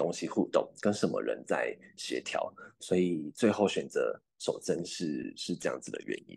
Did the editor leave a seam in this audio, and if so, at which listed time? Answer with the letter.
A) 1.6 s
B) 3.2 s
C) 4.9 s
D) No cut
D